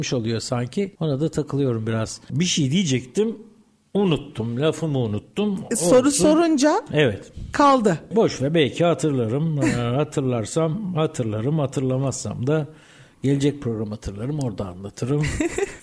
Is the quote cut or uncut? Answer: uncut